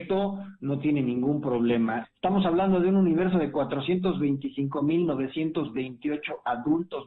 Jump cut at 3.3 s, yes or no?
no